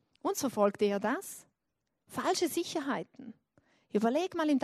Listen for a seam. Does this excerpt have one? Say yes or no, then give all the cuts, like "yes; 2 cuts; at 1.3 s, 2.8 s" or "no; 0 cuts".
no; 0 cuts